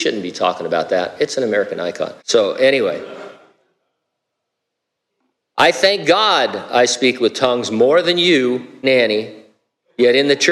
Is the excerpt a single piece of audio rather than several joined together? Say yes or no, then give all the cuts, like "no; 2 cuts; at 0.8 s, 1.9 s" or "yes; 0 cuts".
no; 2 cuts; at 2.2 s, 8.8 s